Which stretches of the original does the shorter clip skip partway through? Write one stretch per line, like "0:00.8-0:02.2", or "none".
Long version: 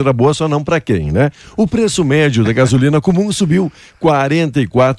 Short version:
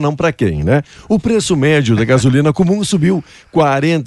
none